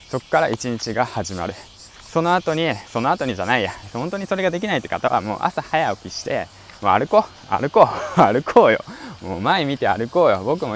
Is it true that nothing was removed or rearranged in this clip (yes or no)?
no